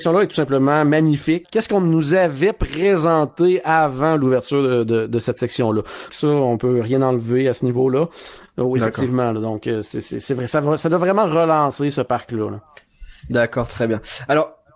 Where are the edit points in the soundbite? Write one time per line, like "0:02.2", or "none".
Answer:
0:01.4
0:06.1
0:08.5